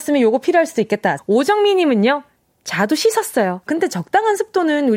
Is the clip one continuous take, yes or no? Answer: no